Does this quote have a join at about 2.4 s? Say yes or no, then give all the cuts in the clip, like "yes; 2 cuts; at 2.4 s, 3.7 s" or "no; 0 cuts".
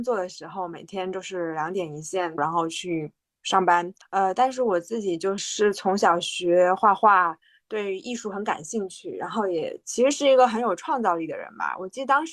yes; 2 cuts; at 2.4 s, 5.4 s